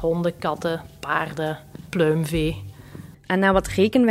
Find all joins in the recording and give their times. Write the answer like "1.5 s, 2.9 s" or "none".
3.1 s